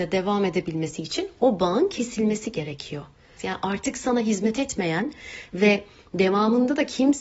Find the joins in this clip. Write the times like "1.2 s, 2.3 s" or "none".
3.4 s